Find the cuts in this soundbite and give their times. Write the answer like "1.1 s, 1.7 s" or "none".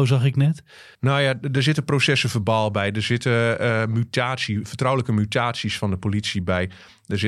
0.9 s